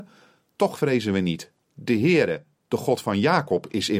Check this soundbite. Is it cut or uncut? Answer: cut